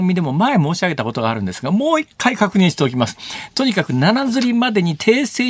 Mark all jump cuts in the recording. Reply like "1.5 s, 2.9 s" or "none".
none